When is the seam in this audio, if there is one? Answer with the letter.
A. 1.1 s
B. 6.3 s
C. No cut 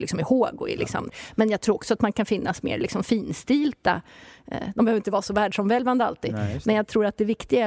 A